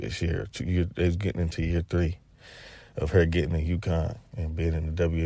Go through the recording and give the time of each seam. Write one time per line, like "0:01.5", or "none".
0:04.3